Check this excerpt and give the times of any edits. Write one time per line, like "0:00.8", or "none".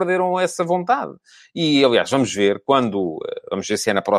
none